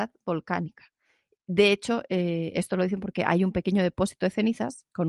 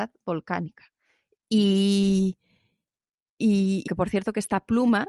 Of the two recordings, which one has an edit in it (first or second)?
second